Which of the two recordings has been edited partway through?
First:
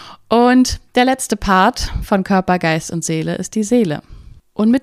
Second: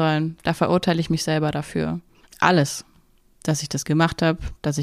second; 1 cut; at 2.3 s

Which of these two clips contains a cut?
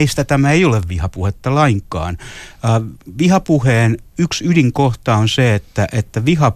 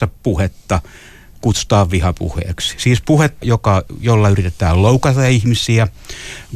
second; 1 cut; at 3.4 s

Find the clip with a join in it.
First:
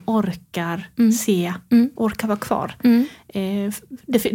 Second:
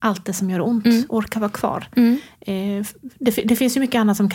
first; 1 cut; at 2.0 s

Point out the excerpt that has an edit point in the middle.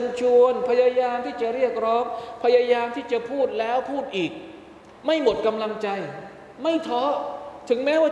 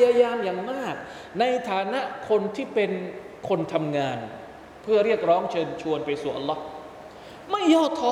first; 1 cut; at 5.0 s

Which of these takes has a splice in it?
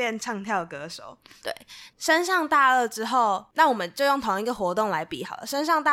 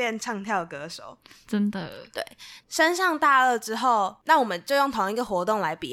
first; 1 cut; at 1.4 s

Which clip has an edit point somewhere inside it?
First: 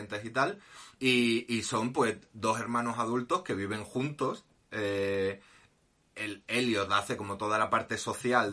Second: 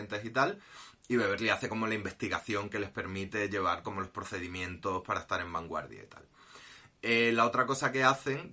first; 1 cut; at 1.0 s

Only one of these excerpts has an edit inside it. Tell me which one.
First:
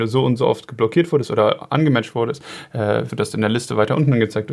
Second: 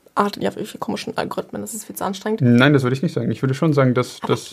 first; 1 cut; at 3.1 s

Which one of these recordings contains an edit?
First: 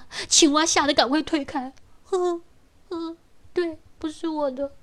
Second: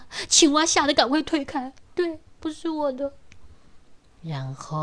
second; 1 cut; at 1.9 s

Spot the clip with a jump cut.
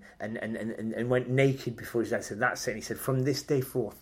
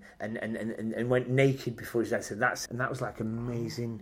second; 1 cut; at 2.7 s

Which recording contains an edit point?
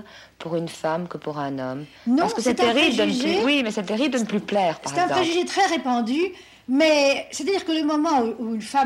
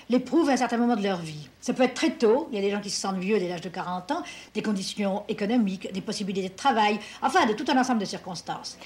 second; 2 cuts; at 1.6 s, 4.5 s

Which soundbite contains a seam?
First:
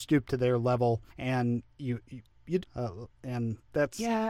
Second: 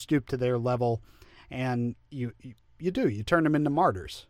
first; 2 cuts; at 1.1 s, 2.6 s

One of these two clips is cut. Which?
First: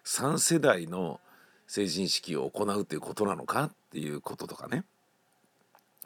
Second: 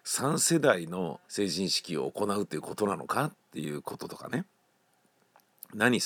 second; 1 cut; at 1.2 s

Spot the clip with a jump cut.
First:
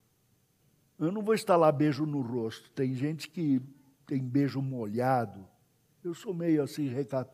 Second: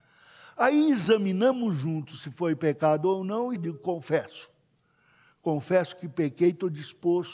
second; 1 cut; at 3.6 s

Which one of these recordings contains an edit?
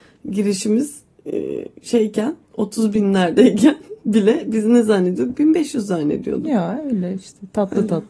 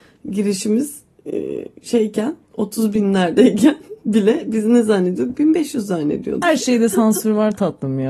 second; 1 cut; at 6.4 s

